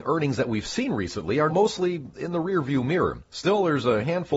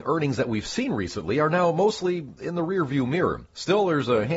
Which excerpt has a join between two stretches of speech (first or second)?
first